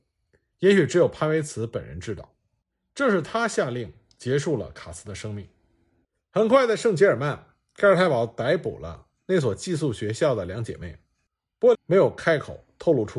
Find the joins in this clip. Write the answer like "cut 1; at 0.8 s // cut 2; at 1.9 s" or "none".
cut 1; at 11.7 s

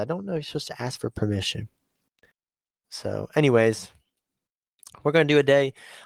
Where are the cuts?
cut 1; at 2.8 s

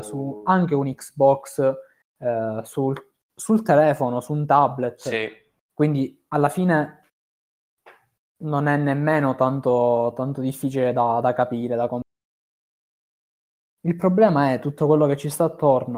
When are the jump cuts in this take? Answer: none

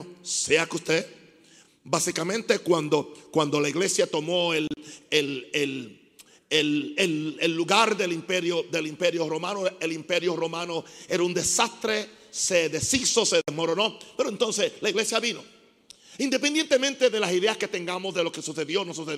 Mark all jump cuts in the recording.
none

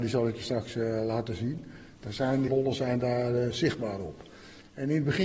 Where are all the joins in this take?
cut 1; at 2.5 s

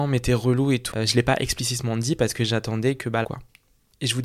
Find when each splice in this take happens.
cut 1; at 0.9 s // cut 2; at 3.2 s

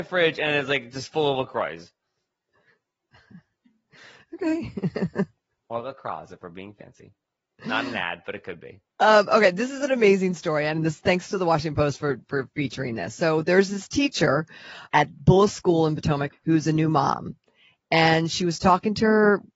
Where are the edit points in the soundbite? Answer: cut 1; at 14.9 s // cut 2; at 16.3 s

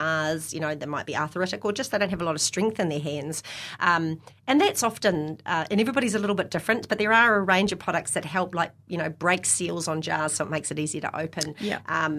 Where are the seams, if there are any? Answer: none

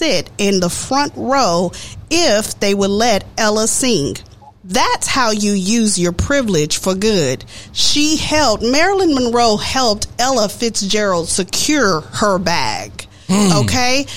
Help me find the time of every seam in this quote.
cut 1; at 4.6 s

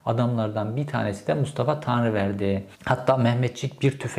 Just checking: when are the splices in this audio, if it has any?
cut 1; at 2.7 s

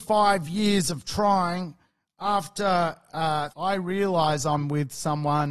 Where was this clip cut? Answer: cut 1; at 3.5 s

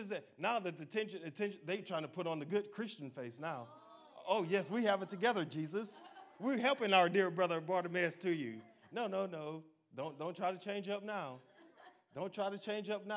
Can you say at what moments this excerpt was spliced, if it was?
none

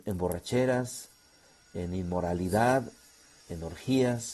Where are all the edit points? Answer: cut 1; at 3.4 s

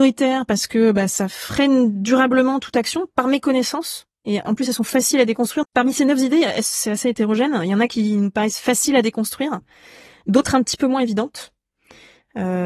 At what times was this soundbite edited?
cut 1; at 5.6 s

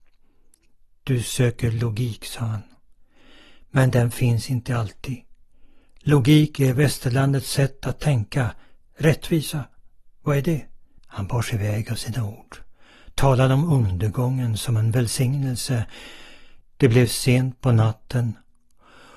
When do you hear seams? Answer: cut 1; at 11.0 s // cut 2; at 16.6 s

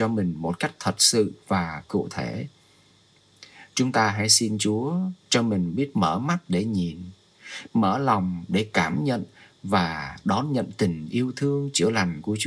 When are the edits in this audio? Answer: cut 1; at 7.7 s

